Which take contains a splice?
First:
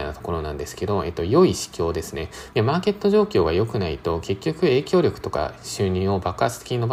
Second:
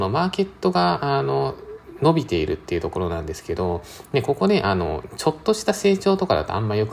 first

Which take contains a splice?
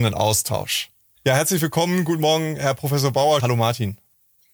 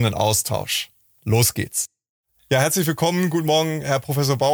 first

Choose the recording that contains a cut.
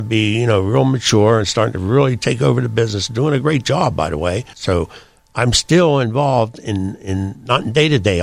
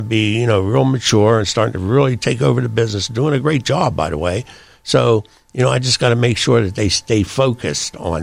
first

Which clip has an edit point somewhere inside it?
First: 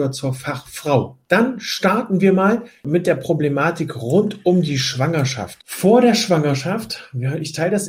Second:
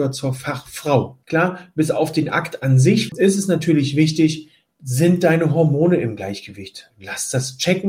second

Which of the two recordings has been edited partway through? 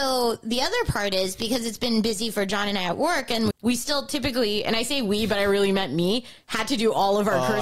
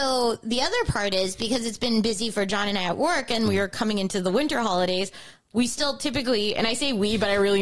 first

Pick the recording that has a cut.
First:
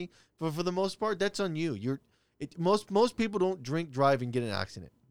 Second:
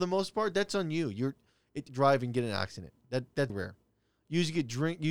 second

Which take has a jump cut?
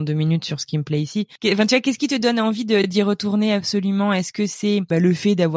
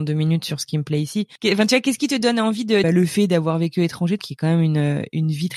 second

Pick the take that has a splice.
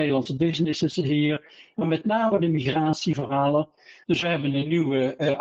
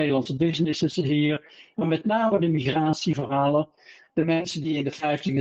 first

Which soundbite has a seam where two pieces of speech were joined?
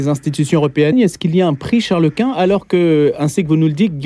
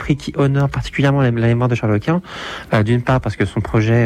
first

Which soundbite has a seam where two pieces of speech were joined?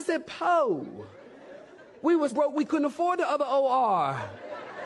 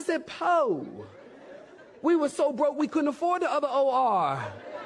first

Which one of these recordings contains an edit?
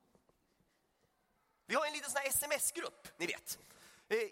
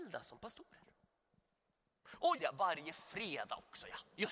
second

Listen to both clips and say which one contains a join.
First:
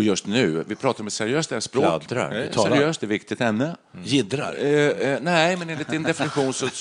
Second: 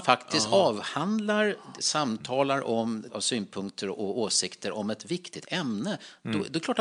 second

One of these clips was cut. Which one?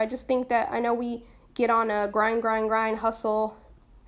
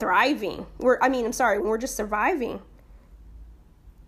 second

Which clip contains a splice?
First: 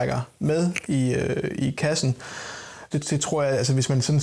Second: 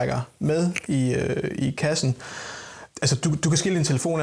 first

